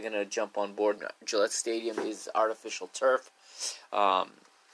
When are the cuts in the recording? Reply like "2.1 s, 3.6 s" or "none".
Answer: 1.0 s